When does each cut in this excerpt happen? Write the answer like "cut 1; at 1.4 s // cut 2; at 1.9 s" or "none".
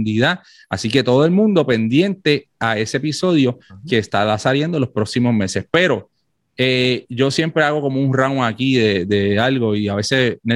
none